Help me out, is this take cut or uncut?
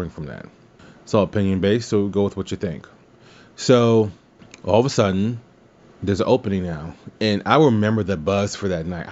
uncut